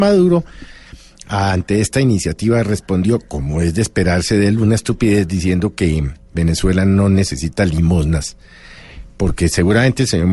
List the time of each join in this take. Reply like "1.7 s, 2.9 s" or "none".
none